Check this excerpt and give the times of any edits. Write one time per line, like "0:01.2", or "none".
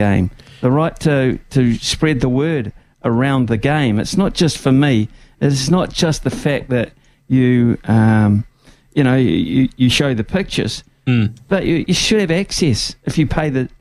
0:11.9